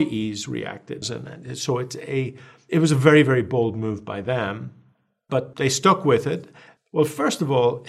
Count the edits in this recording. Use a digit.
2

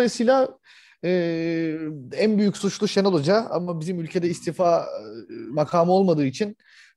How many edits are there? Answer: 0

